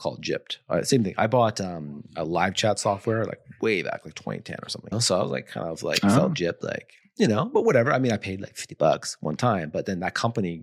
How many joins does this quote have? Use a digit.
1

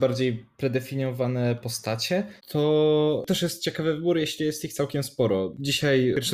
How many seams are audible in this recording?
1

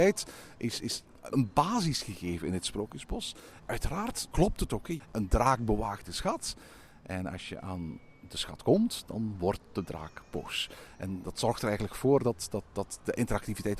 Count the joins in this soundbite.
2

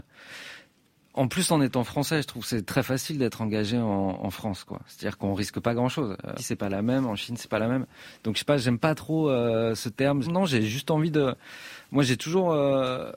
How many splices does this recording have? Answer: 2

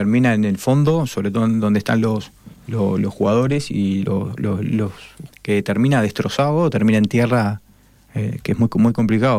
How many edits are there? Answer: 2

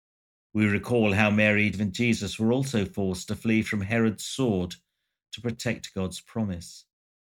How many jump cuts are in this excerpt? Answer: 1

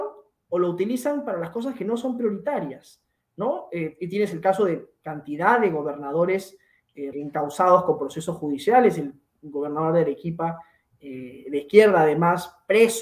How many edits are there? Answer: 1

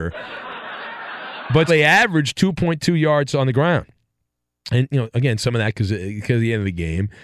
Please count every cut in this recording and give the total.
1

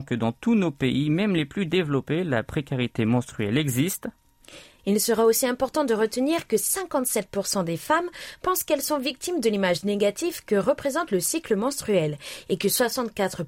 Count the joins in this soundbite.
1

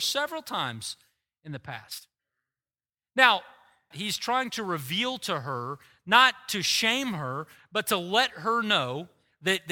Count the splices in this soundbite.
1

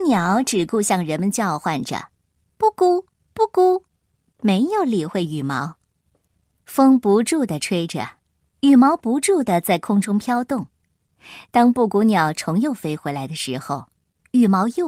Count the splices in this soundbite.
0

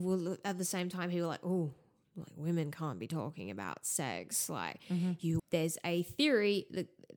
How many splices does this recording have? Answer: 1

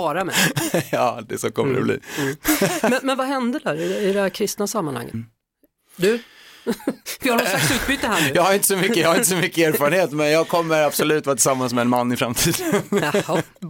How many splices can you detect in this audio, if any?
1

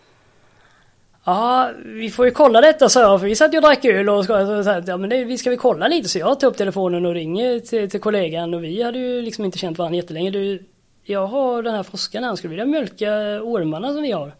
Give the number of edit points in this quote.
0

